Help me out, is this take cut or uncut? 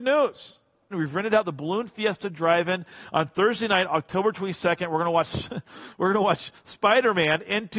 cut